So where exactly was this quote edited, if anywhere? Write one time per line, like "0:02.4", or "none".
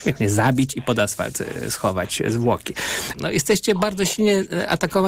0:03.1